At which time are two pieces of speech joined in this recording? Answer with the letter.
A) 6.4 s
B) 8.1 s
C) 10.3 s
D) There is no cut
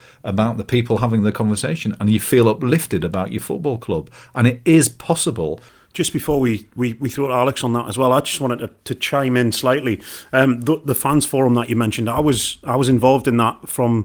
D